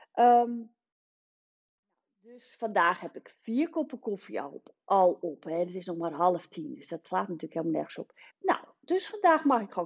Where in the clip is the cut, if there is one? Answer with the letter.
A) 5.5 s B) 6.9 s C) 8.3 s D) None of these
C